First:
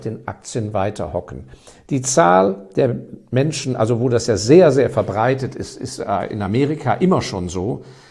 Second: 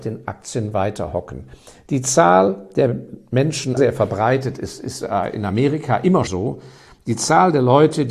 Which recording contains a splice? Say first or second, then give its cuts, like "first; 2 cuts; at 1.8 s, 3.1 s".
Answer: second; 2 cuts; at 3.8 s, 6.3 s